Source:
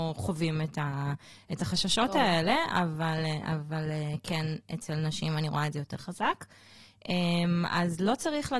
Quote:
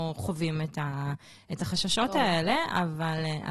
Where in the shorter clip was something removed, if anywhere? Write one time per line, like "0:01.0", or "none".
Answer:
none